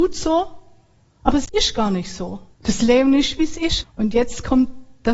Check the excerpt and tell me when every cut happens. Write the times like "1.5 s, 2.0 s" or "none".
2.5 s, 3.8 s

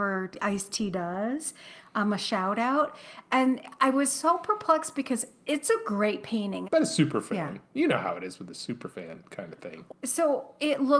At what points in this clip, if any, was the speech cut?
6.6 s, 9.9 s

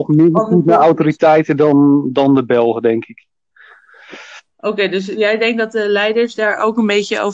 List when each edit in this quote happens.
none

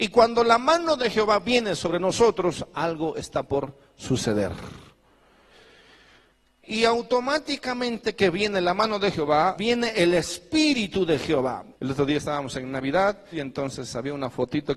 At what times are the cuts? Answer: 9.6 s, 11.7 s, 13.3 s

